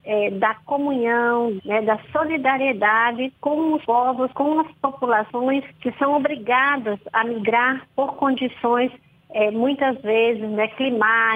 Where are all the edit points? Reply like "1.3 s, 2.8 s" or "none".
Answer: 1.6 s